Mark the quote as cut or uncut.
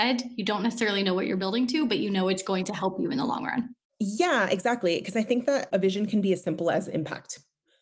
uncut